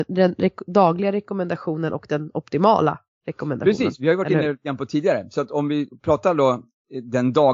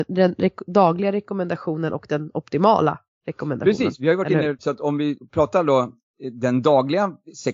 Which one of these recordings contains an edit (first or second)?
second